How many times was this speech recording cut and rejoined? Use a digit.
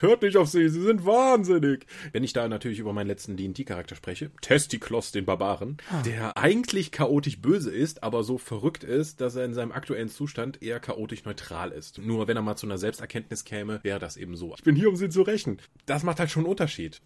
2